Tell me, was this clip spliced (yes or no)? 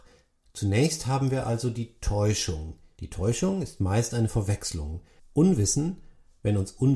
yes